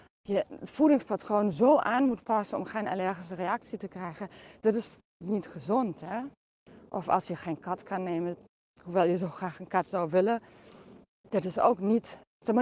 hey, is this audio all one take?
yes; 0 cuts

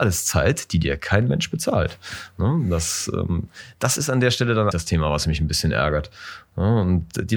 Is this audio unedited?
no; 1 cut; at 4.7 s

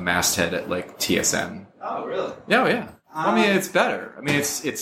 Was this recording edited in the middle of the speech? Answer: no; 0 cuts

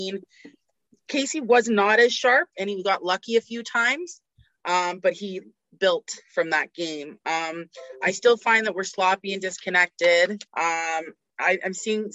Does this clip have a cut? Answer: yes; 1 cut; at 10.5 s

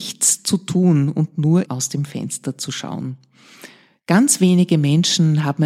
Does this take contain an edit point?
yes; 1 cut; at 1.7 s

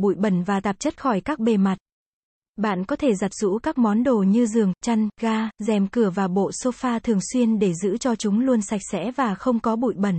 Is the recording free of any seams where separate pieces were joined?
yes; 0 cuts

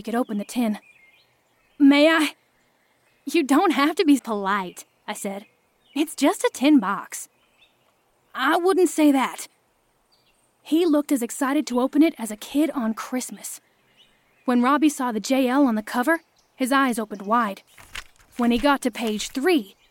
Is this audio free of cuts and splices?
no; 1 cut; at 4.2 s

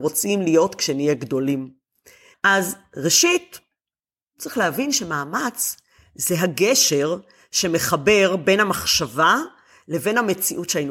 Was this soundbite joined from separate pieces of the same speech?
yes; 1 cut; at 2.3 s

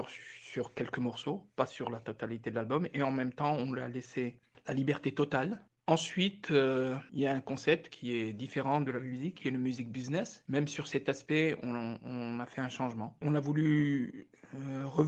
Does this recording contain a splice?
no; 0 cuts

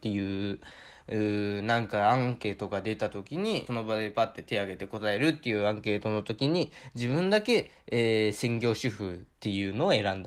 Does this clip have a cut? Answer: yes; 1 cut; at 3.7 s

